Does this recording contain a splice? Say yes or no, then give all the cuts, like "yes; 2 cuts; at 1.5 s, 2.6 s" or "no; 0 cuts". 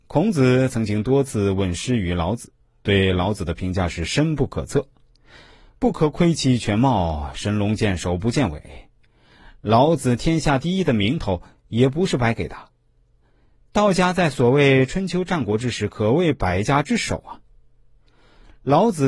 no; 0 cuts